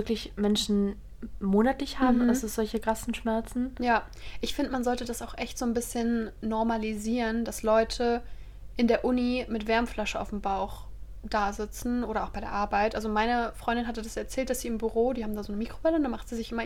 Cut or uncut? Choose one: uncut